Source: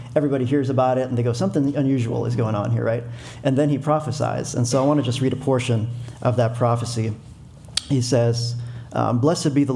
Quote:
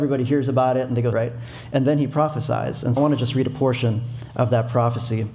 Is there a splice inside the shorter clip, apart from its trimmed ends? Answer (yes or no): yes